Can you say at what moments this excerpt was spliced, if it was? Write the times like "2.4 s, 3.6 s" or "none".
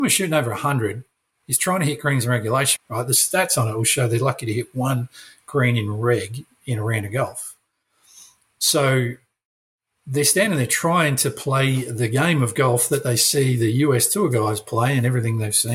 2.8 s